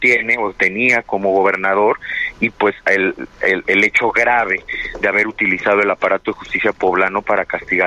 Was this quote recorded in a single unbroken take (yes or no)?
no